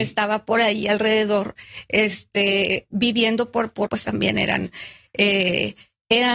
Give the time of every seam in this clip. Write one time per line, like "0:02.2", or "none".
0:03.9